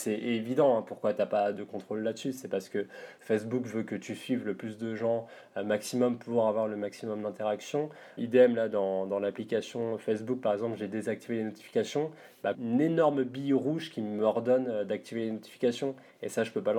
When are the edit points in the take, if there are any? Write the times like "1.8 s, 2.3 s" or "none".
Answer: 8.2 s, 12.5 s